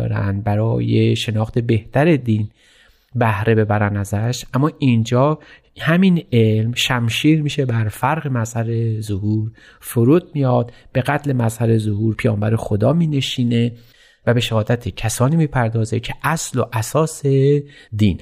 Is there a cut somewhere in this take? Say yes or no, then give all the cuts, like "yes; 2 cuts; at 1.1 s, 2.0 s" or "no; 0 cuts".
no; 0 cuts